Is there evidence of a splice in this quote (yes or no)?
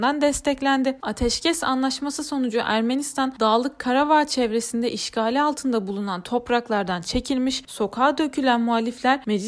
yes